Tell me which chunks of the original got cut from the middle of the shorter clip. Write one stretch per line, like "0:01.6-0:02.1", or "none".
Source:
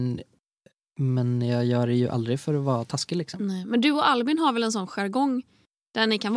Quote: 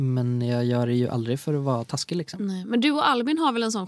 none